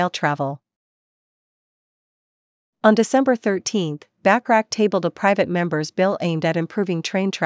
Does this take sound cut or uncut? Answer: cut